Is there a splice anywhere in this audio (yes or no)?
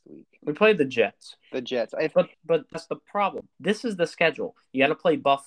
yes